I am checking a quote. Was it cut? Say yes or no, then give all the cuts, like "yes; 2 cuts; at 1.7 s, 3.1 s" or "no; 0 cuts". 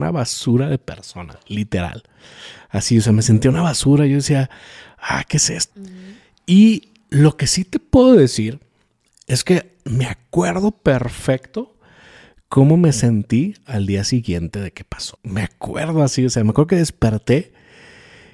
yes; 2 cuts; at 5.7 s, 15.2 s